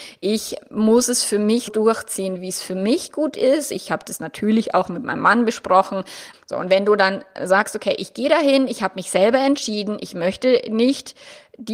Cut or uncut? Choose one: cut